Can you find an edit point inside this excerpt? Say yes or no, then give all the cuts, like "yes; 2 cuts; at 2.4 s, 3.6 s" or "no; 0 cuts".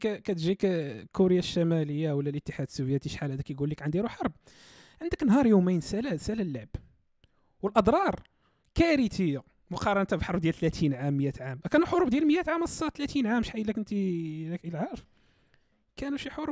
no; 0 cuts